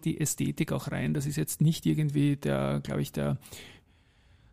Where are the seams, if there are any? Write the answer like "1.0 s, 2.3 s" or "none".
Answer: none

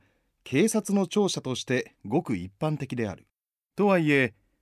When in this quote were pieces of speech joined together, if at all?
3.7 s

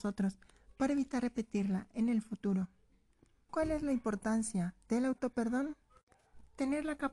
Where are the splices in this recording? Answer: 3.5 s

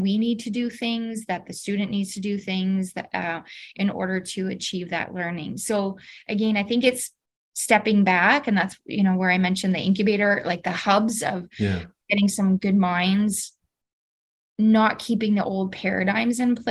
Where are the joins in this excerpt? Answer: none

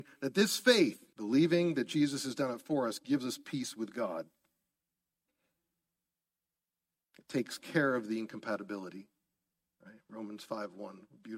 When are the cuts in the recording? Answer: 1.1 s

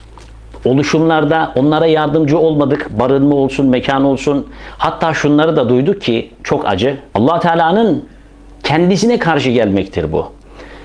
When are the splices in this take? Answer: 7.1 s

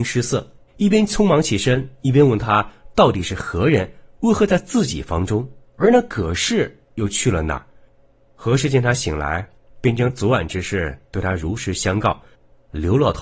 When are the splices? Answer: none

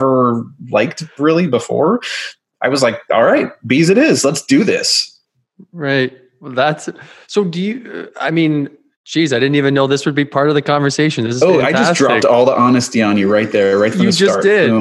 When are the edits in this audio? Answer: none

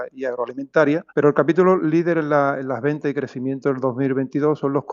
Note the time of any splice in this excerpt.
1.1 s

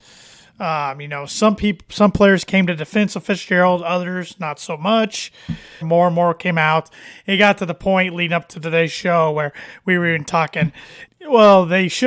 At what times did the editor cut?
5.8 s, 11.1 s

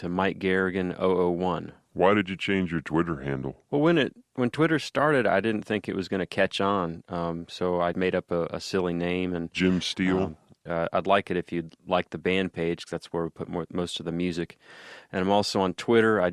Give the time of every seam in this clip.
7.9 s, 10.7 s

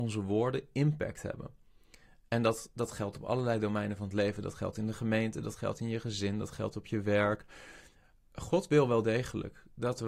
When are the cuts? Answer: none

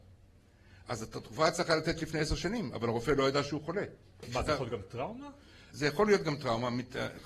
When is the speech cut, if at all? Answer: 4.2 s

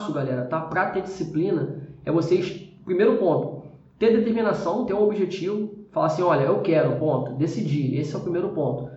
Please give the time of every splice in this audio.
none

